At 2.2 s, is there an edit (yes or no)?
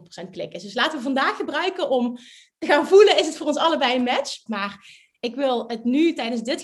no